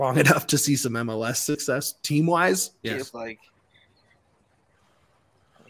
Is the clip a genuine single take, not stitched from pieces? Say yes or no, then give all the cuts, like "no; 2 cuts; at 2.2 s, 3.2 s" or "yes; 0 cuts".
no; 1 cut; at 2.8 s